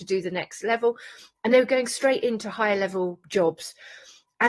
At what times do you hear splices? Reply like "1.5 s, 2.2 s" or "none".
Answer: none